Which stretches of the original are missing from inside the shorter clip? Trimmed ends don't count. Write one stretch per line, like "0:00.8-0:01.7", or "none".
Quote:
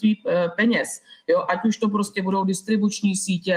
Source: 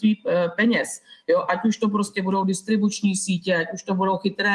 none